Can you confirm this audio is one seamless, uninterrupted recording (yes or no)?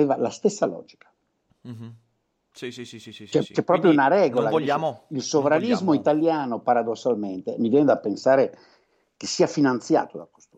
yes